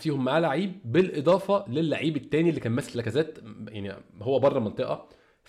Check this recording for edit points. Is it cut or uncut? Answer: cut